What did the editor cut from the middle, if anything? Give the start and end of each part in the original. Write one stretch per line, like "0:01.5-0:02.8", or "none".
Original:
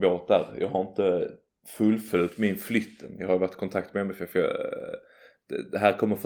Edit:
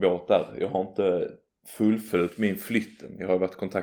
none